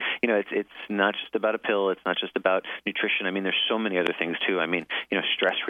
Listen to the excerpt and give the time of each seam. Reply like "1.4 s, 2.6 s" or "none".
none